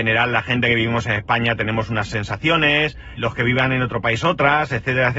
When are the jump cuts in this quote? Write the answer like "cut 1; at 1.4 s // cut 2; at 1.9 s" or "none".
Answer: cut 1; at 3.2 s